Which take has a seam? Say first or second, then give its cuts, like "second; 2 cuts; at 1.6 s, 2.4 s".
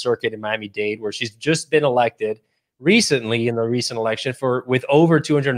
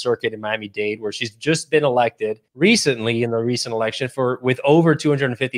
second; 1 cut; at 2.5 s